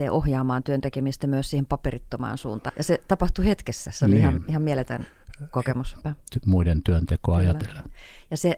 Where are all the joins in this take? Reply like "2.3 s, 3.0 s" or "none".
2.7 s, 6.0 s